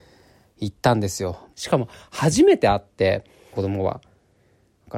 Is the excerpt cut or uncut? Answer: cut